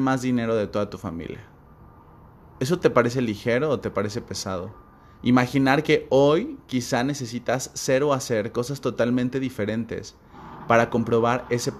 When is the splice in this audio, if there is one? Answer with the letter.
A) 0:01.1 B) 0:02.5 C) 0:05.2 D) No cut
C